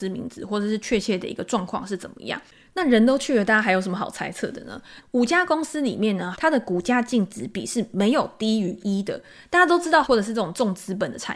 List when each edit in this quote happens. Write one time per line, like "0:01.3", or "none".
0:05.0
0:06.3
0:10.0